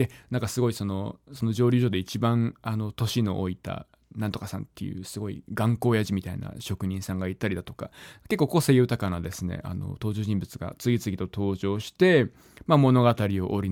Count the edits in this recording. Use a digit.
0